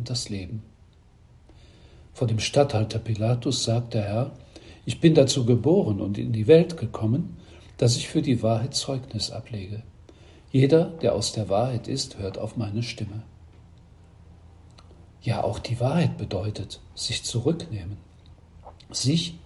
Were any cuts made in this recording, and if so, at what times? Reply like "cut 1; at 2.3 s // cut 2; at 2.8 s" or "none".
none